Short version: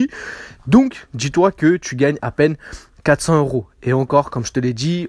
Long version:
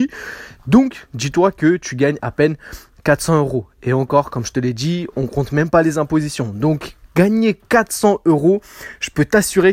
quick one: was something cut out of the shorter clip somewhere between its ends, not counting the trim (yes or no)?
no